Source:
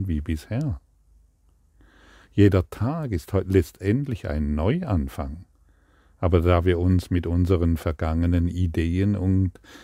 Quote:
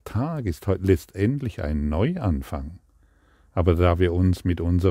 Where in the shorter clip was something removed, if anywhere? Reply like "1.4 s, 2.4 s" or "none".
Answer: none